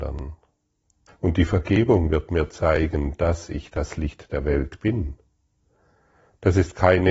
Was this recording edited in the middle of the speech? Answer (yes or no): yes